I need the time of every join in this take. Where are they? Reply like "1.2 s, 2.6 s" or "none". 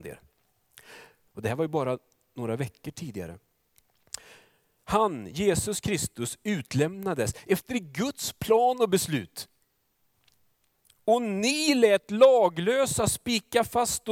1.3 s